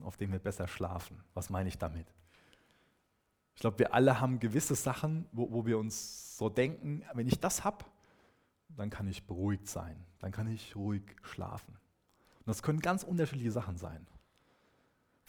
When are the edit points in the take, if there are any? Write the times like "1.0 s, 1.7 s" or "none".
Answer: none